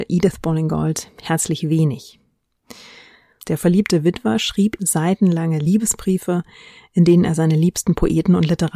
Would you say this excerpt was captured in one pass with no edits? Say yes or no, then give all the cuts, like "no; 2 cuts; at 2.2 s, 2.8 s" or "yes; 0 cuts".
no; 1 cut; at 3.4 s